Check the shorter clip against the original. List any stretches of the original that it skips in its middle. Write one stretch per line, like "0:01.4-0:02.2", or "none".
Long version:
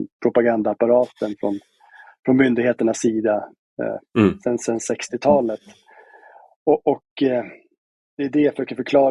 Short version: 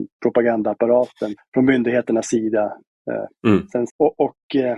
0:01.4-0:02.1
0:04.6-0:06.5